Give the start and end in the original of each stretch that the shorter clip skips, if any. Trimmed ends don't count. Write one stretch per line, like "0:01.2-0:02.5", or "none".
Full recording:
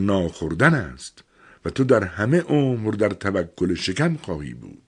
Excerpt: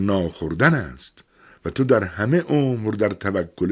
none